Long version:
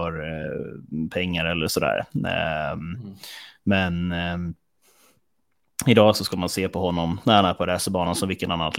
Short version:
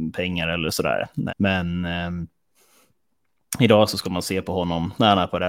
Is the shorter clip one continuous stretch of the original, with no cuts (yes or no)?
no